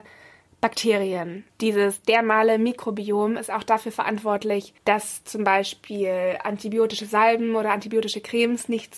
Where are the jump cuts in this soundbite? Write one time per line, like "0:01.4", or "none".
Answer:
0:01.5
0:04.8

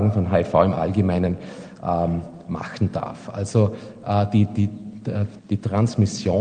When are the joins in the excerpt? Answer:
0:05.4

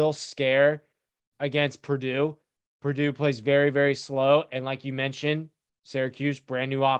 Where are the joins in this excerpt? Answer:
none

